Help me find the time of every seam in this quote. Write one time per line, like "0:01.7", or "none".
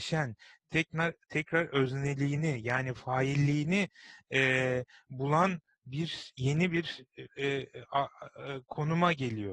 none